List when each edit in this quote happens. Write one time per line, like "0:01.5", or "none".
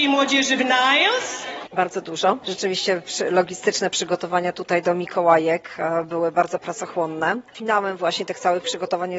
0:01.7
0:07.5